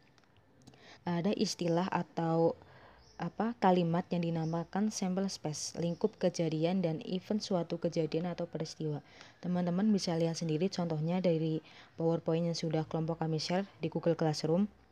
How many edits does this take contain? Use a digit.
1